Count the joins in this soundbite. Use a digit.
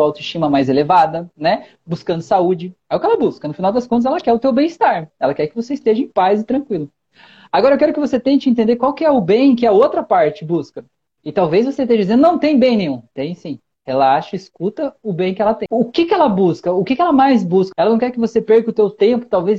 2